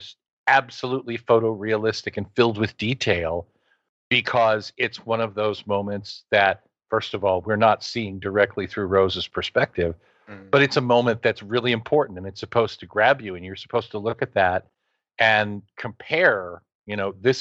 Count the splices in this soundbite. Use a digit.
0